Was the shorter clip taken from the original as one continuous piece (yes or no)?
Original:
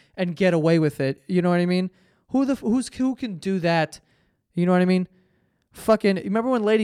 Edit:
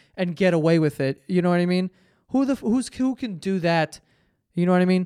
yes